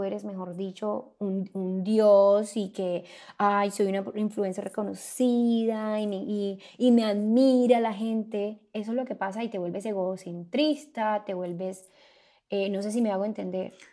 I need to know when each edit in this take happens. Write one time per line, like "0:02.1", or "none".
none